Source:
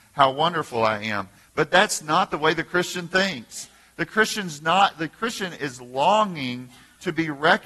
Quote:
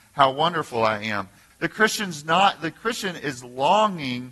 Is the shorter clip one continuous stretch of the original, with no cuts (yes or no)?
no